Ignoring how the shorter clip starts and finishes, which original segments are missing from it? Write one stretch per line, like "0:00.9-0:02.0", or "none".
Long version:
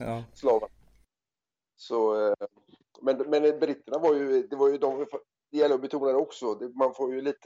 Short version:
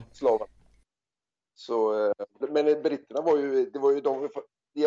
0:02.6-0:03.2